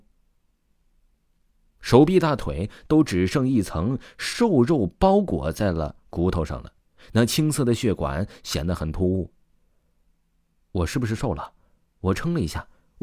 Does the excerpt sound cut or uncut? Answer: uncut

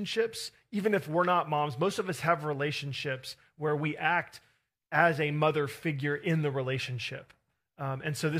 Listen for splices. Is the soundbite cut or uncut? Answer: uncut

